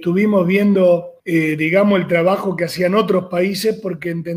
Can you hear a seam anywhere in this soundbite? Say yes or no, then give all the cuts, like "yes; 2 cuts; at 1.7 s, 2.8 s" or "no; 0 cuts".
yes; 1 cut; at 1.2 s